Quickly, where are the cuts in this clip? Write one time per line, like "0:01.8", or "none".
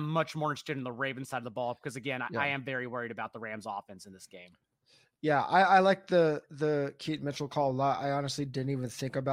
none